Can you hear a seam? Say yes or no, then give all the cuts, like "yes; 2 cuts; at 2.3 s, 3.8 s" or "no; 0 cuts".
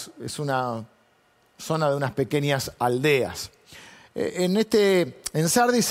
no; 0 cuts